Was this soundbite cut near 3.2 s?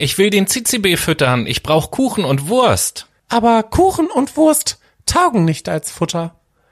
yes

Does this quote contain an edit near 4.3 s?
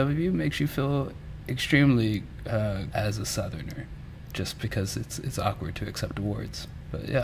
no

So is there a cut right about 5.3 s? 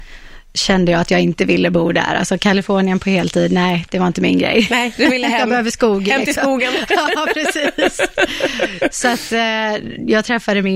no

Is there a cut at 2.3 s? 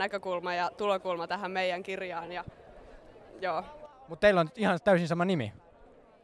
no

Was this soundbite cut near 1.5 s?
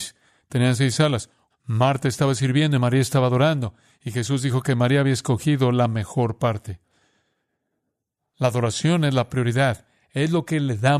yes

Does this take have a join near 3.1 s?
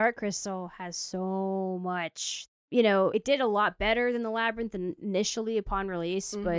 no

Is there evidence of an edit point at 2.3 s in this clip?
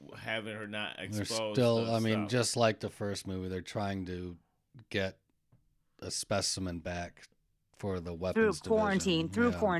no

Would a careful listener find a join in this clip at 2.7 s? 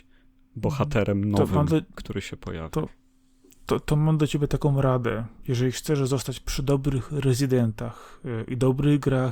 no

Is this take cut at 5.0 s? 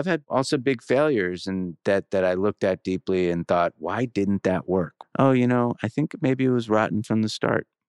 yes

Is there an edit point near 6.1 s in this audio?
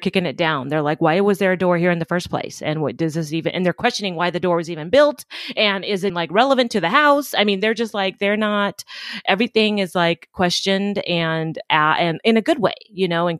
yes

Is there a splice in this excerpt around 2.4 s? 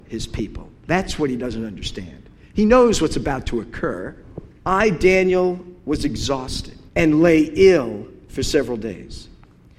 no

